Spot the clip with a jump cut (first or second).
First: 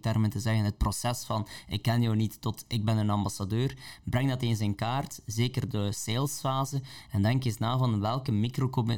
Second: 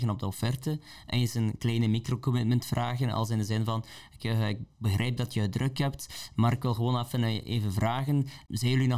second